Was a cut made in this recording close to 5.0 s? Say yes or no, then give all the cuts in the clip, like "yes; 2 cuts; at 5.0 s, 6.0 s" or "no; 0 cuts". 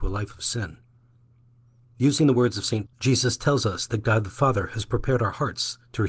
no; 2 cuts; at 1.8 s, 2.9 s